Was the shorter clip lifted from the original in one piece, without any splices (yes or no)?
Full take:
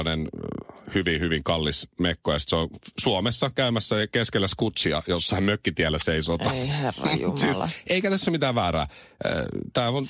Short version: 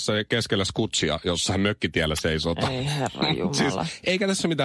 yes